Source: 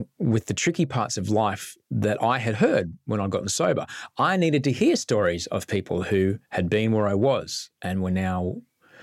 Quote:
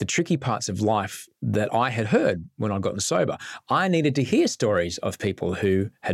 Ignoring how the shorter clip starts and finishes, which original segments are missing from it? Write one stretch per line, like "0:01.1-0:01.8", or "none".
none